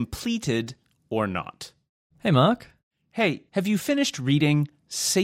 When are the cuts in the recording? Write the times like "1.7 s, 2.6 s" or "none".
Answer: 2.1 s, 3.5 s